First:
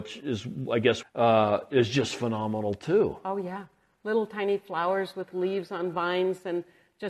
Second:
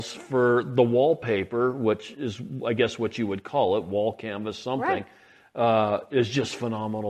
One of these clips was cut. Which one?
first; 1 cut; at 1.0 s

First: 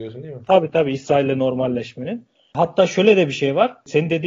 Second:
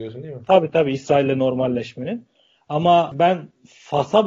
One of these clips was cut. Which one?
first; 1 cut; at 2.5 s

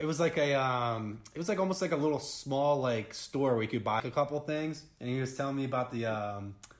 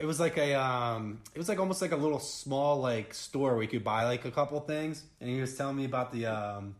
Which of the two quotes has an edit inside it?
first; 1 cut; at 4.0 s

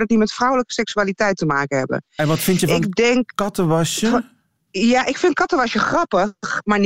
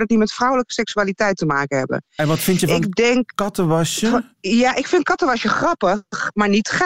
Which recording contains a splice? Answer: second; 1 cut; at 4.3 s

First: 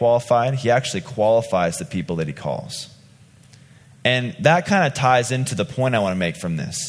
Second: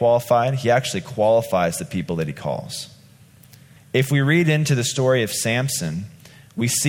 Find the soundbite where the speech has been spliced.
second; 1 cut; at 3.8 s

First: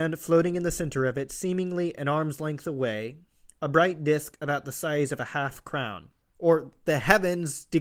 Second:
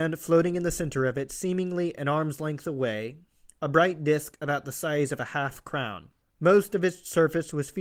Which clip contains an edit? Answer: first; 1 cut; at 6.3 s

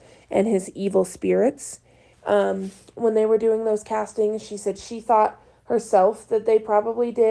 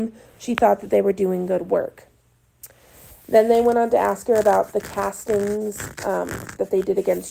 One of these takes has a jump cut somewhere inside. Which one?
first; 1 cut; at 2.1 s

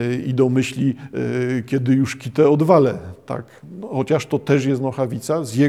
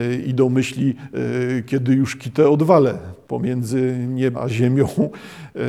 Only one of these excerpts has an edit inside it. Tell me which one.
second; 2 cuts; at 3.2 s, 4.3 s

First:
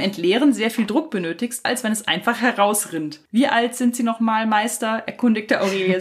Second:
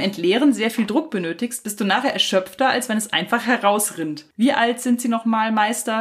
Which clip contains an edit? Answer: first; 1 cut; at 1.7 s

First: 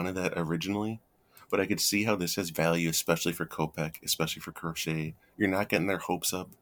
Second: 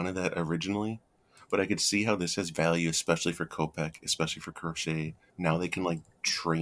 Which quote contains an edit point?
second; 1 cut; at 5.3 s

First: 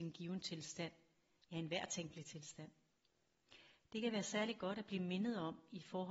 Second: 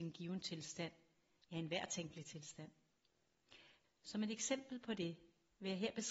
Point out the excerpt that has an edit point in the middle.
second; 1 cut; at 3.8 s

